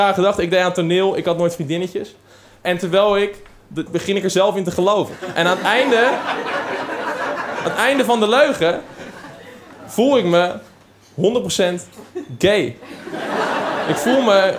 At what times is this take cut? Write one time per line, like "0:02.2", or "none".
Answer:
0:03.9